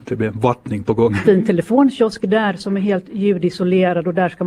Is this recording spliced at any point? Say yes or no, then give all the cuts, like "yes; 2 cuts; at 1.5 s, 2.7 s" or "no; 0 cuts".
yes; 1 cut; at 1.2 s